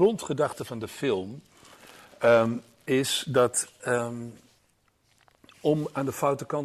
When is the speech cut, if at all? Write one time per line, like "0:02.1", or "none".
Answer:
none

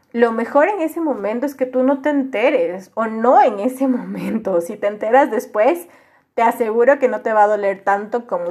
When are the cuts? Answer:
none

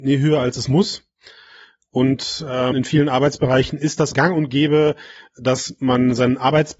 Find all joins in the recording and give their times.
0:02.7
0:04.1

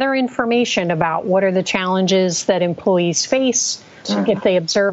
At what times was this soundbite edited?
0:04.0

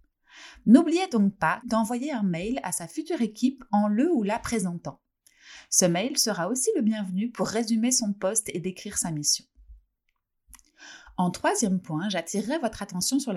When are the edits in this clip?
0:01.6

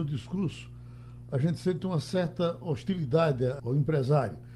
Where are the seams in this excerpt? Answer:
0:03.6

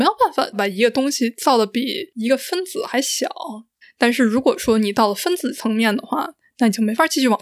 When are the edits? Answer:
0:03.8

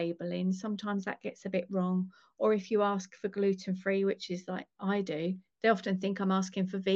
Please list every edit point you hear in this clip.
none

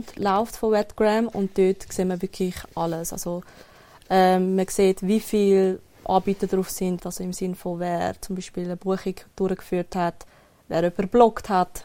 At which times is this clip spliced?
0:07.0

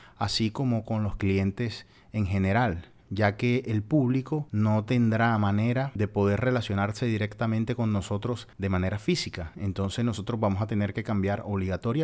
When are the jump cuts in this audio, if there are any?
none

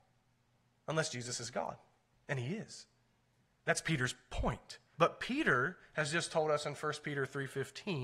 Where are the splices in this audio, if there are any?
0:04.9

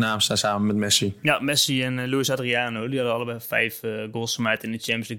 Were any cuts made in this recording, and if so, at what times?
none

